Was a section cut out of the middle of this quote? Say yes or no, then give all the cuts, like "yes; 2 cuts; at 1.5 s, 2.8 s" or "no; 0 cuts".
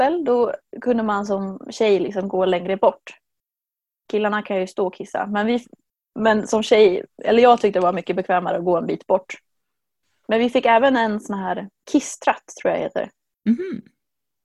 no; 0 cuts